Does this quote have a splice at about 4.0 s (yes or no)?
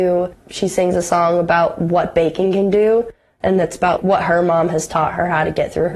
yes